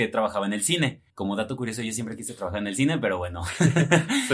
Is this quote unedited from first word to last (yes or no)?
no